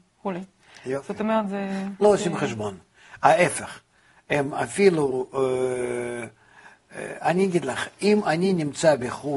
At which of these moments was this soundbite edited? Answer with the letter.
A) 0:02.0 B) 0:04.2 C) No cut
A